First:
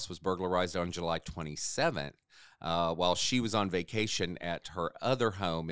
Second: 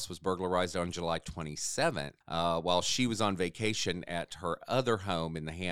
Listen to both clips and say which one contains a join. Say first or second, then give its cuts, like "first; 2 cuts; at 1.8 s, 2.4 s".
second; 1 cut; at 2.2 s